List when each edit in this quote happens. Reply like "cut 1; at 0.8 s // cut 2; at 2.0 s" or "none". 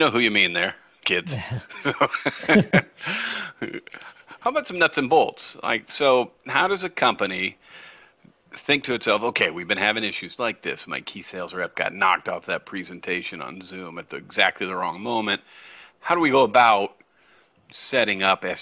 cut 1; at 10.4 s